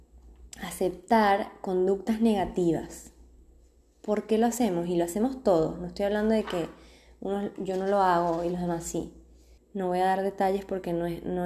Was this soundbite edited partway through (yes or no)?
yes